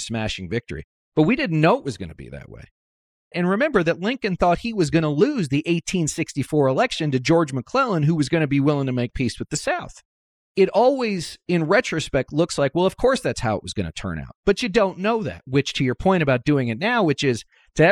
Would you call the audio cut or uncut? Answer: cut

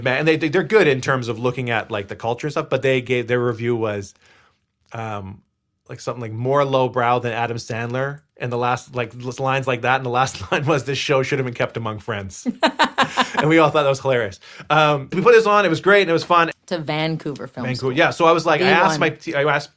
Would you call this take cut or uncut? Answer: cut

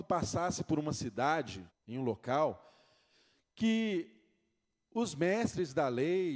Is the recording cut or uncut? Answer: cut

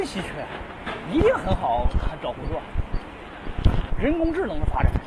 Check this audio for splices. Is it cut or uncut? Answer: cut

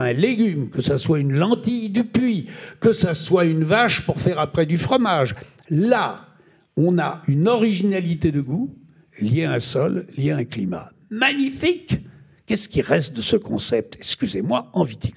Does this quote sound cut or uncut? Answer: uncut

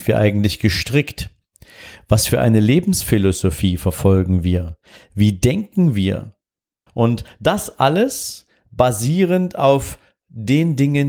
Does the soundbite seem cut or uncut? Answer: cut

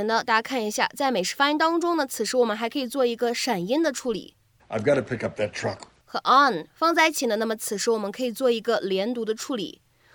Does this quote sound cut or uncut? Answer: cut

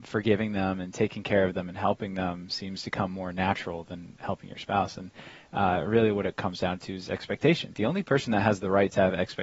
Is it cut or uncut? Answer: cut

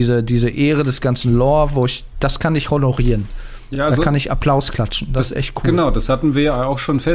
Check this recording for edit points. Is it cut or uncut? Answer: uncut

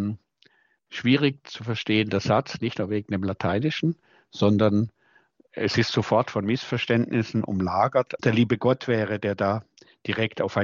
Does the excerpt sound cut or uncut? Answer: cut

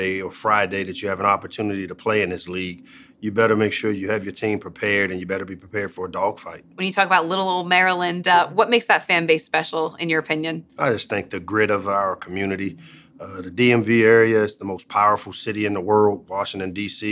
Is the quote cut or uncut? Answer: uncut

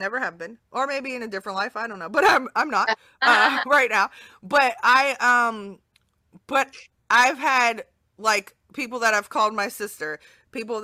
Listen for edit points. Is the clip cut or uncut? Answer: uncut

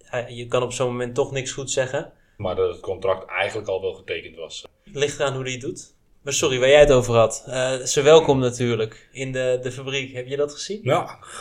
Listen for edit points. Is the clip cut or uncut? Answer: cut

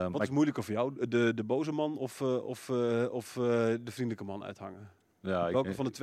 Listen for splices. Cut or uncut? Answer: uncut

